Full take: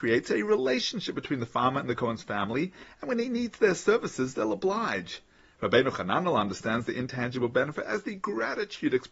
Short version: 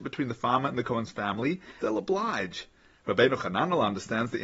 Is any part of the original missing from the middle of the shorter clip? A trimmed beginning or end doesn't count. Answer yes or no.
yes